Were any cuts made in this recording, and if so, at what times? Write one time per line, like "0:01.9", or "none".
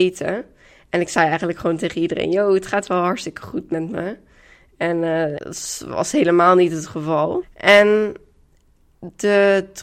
0:05.4
0:07.4